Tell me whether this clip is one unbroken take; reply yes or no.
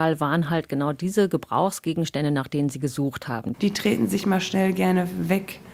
no